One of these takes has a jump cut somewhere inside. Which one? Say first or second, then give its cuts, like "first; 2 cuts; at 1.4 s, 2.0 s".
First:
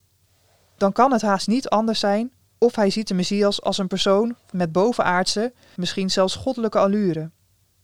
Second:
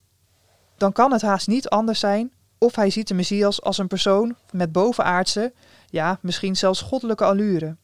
first; 1 cut; at 5.8 s